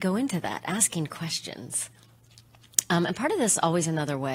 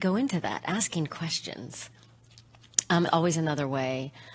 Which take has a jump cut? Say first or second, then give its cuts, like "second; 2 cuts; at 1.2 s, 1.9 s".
second; 1 cut; at 3.1 s